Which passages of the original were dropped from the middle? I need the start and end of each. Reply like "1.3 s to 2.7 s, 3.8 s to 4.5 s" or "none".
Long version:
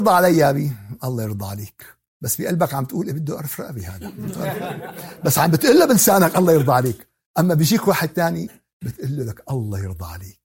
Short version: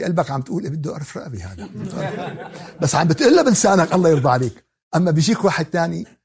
none